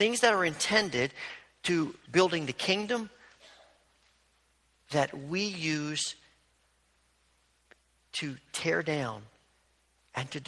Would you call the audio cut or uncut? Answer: cut